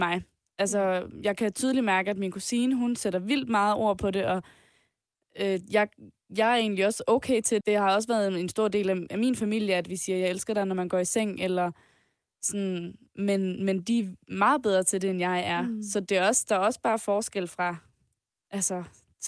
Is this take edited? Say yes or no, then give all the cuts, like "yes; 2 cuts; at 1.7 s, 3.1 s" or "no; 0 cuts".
yes; 1 cut; at 7.6 s